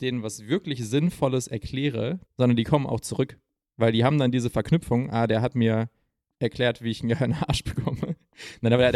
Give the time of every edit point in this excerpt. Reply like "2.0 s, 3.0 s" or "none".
2.3 s